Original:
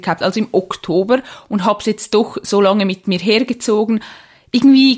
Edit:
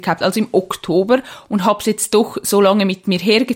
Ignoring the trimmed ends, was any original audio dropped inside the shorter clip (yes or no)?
no